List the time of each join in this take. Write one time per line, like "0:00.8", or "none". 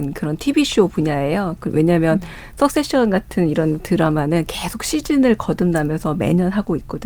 none

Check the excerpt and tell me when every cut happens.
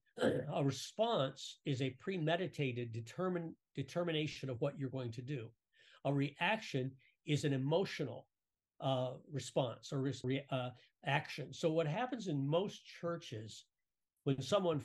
0:10.2

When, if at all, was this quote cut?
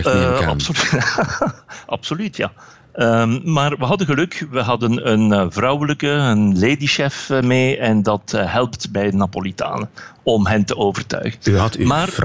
none

